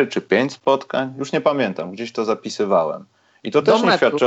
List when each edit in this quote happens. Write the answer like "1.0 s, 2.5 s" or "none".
none